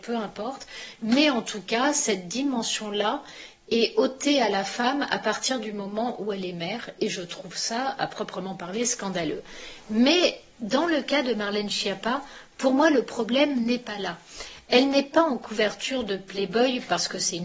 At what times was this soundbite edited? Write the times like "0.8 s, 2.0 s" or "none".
none